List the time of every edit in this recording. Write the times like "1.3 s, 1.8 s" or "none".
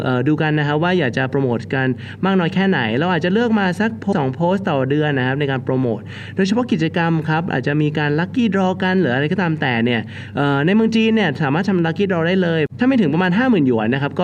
4.1 s